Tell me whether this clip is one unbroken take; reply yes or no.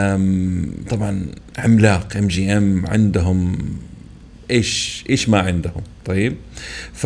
yes